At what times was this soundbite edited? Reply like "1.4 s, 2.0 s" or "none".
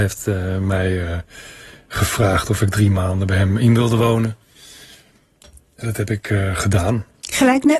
none